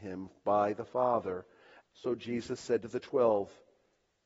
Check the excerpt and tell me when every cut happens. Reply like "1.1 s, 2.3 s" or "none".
1.8 s